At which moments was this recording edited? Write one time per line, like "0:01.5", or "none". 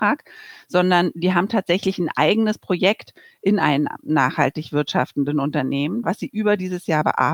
0:06.0